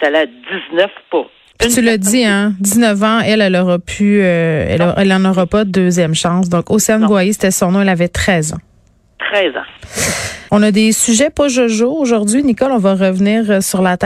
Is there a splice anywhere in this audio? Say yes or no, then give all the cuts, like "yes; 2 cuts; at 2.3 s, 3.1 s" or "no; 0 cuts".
yes; 1 cut; at 10.5 s